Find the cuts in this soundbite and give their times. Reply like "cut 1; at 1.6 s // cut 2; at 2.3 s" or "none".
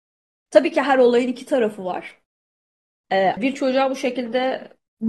cut 1; at 3.4 s